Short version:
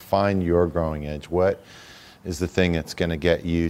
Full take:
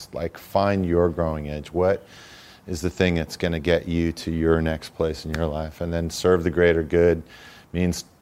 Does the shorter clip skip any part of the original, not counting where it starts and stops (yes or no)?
no